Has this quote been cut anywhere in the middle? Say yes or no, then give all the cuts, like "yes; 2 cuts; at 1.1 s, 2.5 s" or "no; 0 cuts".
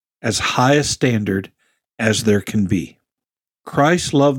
no; 0 cuts